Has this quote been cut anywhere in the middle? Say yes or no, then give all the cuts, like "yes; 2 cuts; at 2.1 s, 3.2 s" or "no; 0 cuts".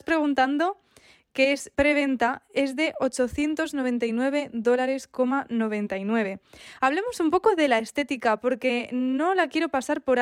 yes; 1 cut; at 1.7 s